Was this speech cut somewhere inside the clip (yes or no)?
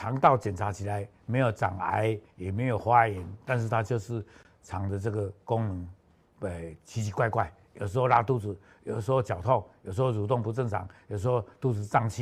no